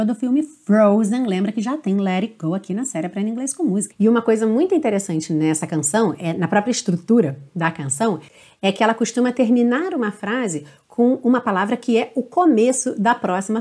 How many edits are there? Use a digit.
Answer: 1